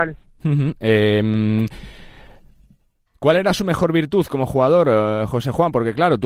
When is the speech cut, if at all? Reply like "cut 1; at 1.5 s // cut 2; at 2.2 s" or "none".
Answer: none